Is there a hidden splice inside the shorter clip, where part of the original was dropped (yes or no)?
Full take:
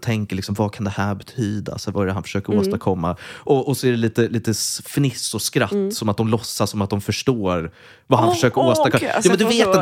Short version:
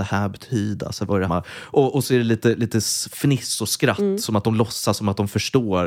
yes